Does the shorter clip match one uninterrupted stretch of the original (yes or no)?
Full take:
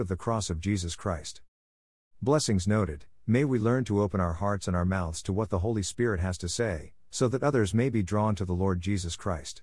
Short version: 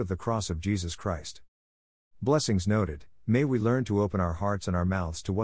yes